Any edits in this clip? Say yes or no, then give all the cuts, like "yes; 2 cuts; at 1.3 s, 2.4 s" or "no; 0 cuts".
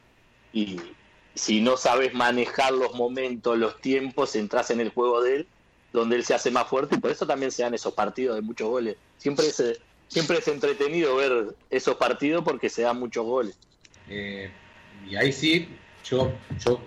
yes; 1 cut; at 13.9 s